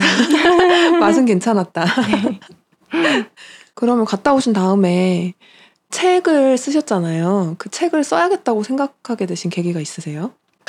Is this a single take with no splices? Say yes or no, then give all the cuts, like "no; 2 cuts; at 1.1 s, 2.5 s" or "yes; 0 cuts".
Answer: yes; 0 cuts